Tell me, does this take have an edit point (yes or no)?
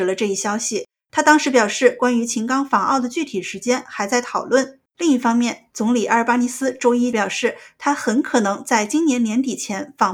yes